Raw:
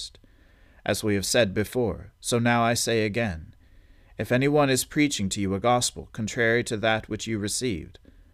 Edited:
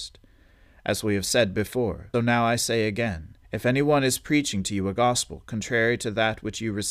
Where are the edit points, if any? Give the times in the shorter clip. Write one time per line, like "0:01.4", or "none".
0:02.1
0:03.4